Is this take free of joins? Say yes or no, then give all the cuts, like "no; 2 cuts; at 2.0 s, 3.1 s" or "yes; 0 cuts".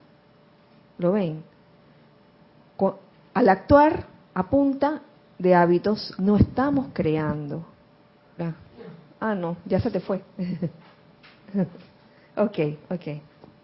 no; 2 cuts; at 6.2 s, 8.4 s